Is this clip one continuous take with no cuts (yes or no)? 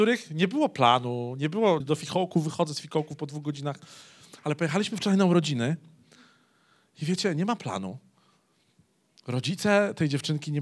no